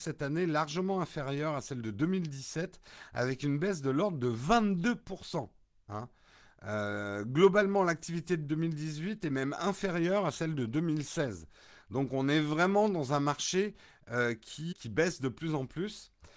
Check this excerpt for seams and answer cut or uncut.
cut